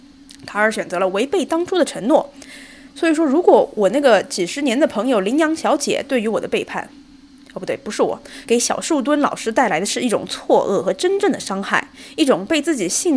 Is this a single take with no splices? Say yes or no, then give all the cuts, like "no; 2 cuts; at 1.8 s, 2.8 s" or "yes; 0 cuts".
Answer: no; 2 cuts; at 2.9 s, 8.4 s